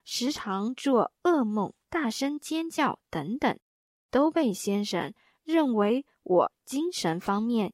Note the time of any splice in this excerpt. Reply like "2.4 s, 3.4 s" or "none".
1.8 s